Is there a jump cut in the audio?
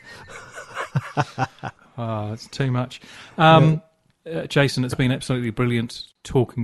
yes; 1 cut; at 1.9 s

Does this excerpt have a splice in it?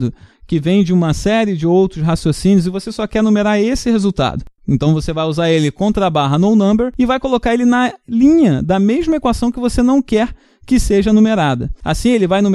yes; 1 cut; at 4.6 s

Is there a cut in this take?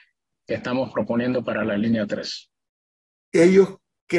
yes; 1 cut; at 3.2 s

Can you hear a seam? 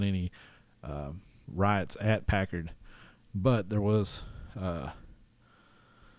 no; 0 cuts

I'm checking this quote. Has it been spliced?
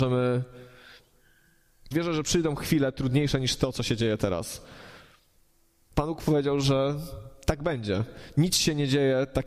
yes; 1 cut; at 1.9 s

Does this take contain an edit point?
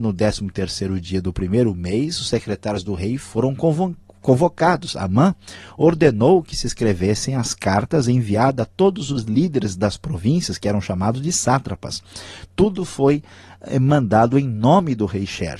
no; 0 cuts

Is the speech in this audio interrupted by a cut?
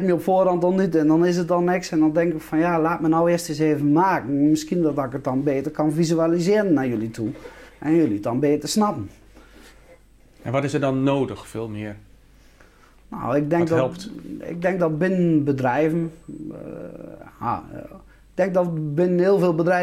no; 0 cuts

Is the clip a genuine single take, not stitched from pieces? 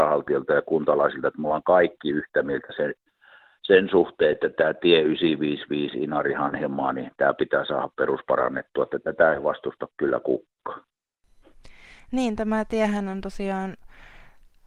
yes; 0 cuts

